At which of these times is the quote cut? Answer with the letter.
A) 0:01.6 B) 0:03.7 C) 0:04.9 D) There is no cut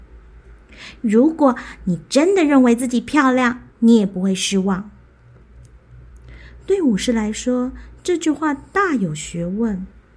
B